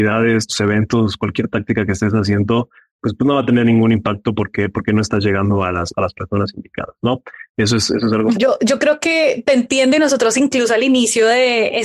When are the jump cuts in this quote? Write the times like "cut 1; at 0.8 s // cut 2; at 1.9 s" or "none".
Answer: cut 1; at 8.3 s